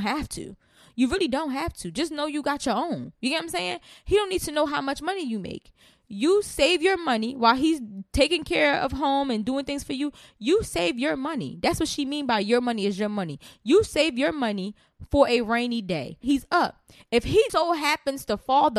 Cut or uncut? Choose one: cut